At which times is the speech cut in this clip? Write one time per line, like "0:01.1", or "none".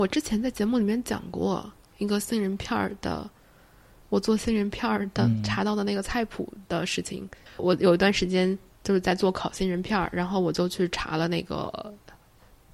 0:07.6

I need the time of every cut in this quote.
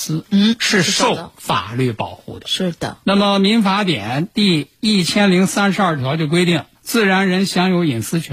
0:06.7

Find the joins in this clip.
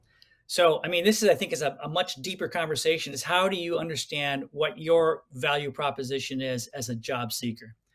0:03.1

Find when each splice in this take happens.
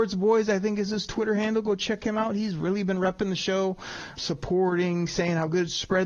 0:04.2

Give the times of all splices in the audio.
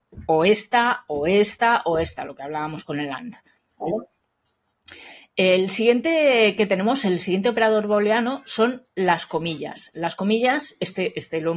none

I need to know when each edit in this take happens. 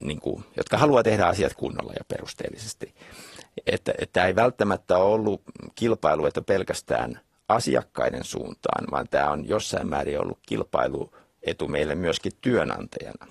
none

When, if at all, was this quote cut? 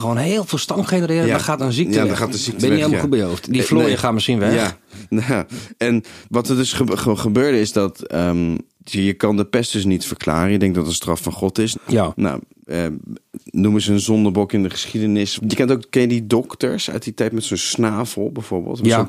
0:11.7
0:15.4

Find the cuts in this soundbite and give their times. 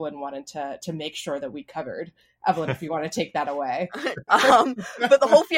0:04.3

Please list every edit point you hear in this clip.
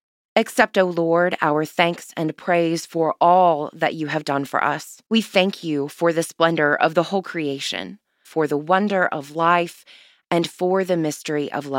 0:05.1
0:08.2

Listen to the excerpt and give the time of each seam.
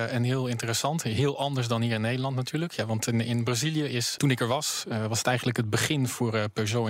0:04.2

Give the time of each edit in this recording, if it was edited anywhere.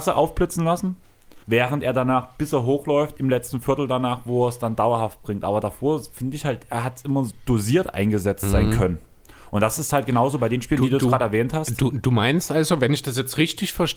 0:01.4

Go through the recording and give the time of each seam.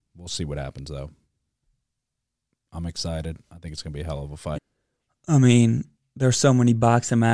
0:04.5

